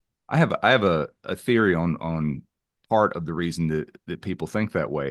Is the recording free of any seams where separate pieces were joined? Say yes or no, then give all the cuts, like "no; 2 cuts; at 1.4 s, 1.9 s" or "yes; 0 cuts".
yes; 0 cuts